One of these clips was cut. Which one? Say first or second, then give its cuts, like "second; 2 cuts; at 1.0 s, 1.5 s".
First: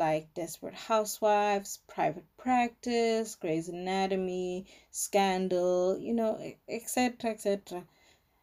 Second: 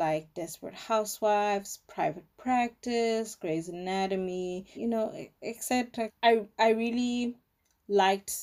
second; 2 cuts; at 4.7 s, 6.1 s